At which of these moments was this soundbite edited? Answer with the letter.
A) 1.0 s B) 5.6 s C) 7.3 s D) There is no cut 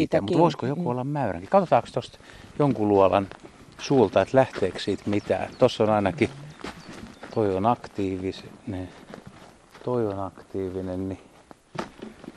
C